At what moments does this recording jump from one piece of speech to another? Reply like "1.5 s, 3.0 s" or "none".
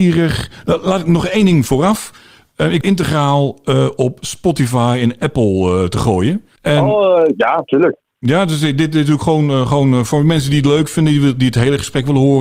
2.8 s, 6.6 s